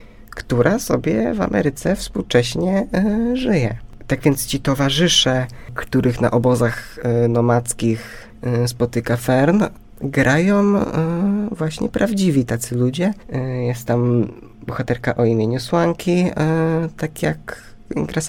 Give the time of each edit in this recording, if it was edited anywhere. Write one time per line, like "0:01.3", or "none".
none

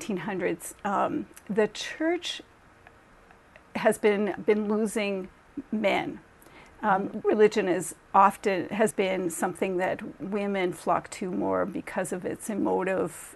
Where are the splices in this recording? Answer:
0:04.4
0:07.2
0:08.9

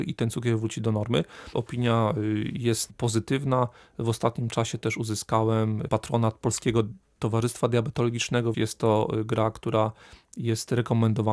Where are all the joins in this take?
0:01.5
0:08.5

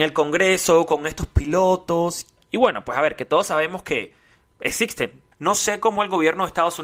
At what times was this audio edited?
0:05.3

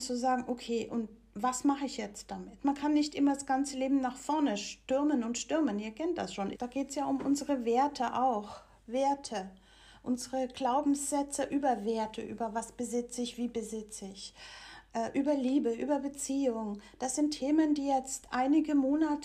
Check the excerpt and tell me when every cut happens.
0:06.5

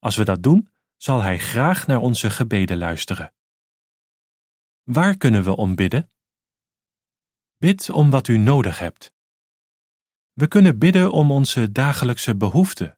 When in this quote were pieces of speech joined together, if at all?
none

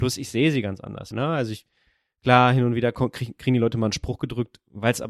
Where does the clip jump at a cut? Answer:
0:01.1

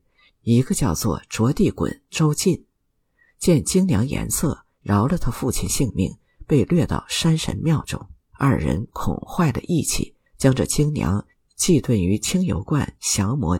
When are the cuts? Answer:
0:08.3
0:10.3

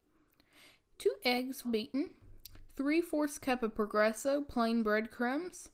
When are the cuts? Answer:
0:01.6

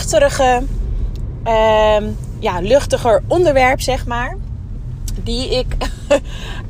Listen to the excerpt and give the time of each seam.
none

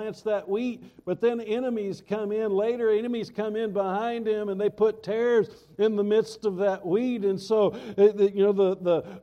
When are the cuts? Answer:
none

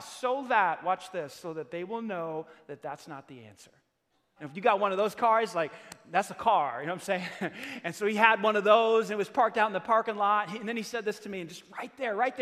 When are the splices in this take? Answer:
0:04.4

